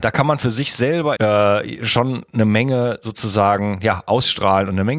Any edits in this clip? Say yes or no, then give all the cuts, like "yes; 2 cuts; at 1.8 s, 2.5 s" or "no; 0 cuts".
yes; 1 cut; at 1.2 s